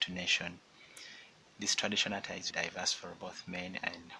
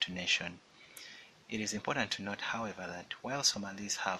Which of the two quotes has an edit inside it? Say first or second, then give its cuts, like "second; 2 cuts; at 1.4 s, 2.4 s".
first; 2 cuts; at 1.5 s, 2.5 s